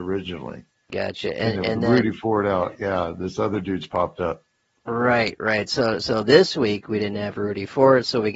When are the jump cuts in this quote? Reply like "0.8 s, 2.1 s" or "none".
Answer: none